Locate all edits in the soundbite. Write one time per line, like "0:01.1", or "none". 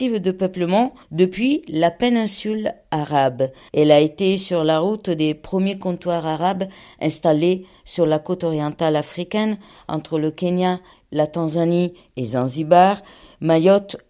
none